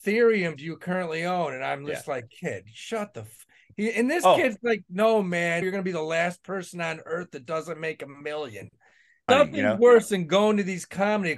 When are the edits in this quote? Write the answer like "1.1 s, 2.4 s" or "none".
5.6 s, 9.3 s